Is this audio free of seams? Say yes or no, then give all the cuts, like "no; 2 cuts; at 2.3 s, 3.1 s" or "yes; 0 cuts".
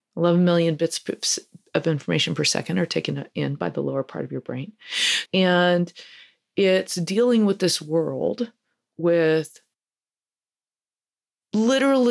no; 1 cut; at 5.3 s